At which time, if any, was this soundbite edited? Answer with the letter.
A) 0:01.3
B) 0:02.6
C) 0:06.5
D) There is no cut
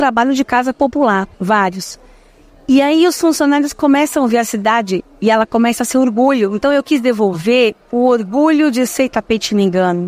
A